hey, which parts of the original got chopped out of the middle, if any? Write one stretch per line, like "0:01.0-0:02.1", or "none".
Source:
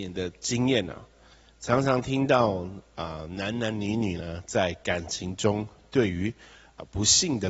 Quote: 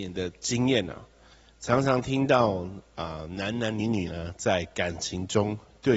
0:03.8-0:03.9